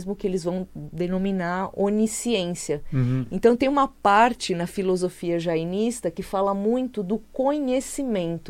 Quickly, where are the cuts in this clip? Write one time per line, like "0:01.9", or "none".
none